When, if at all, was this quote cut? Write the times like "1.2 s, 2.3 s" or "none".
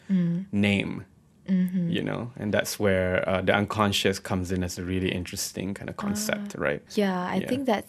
6.9 s